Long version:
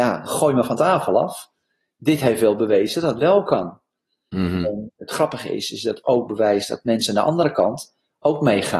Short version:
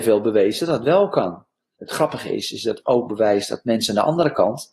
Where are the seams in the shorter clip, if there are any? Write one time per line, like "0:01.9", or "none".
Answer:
0:01.8